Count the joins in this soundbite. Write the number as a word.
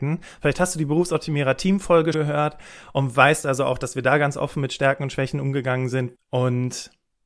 two